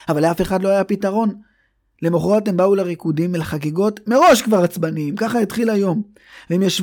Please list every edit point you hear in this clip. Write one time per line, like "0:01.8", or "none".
none